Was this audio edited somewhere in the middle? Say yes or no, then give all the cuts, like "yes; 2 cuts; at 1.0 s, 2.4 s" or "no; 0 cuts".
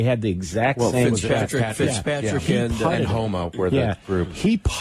no; 0 cuts